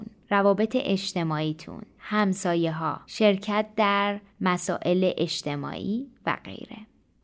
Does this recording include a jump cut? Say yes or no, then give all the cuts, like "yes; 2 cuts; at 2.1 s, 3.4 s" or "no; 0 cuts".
yes; 1 cut; at 2.0 s